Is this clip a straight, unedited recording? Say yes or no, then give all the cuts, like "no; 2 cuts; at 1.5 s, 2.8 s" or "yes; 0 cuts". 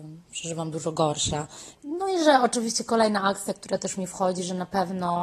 no; 1 cut; at 1.7 s